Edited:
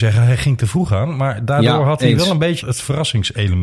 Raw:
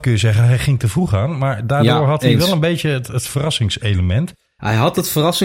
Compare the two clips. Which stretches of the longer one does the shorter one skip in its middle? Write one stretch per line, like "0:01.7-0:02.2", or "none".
0:02.8-0:03.1